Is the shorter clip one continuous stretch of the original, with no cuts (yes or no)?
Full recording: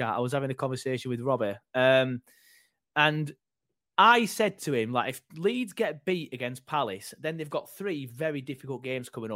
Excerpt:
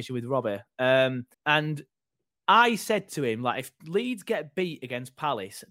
no